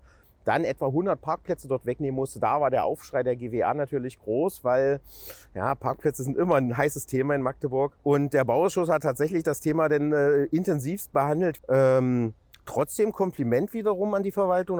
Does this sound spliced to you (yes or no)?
yes